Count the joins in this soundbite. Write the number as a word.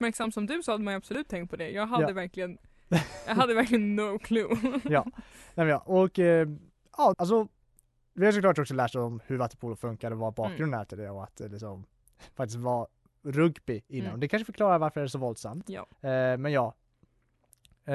two